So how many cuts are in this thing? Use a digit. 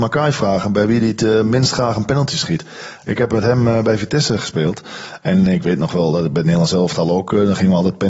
0